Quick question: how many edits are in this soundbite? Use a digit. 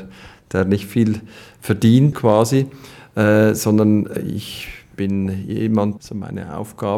2